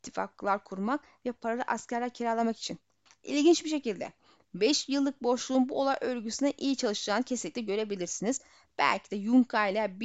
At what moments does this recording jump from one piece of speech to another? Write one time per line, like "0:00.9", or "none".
0:03.1